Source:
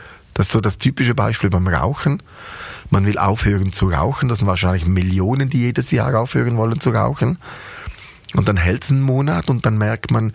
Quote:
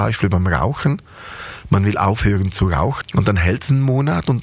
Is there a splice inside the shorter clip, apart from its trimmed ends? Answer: yes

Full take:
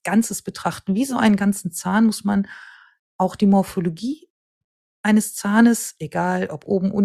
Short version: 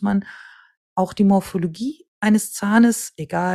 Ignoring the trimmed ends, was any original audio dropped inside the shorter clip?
yes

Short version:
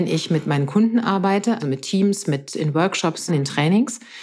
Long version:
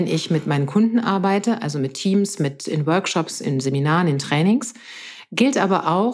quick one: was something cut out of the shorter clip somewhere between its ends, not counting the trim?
yes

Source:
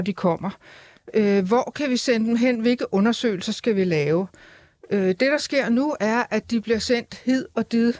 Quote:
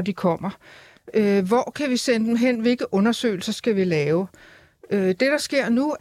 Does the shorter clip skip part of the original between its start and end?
no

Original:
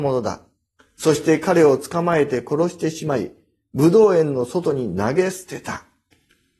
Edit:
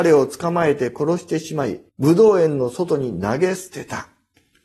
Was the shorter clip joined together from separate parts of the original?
yes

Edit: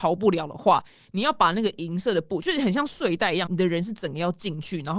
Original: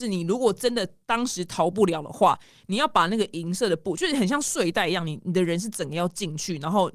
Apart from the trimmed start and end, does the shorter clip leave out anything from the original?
yes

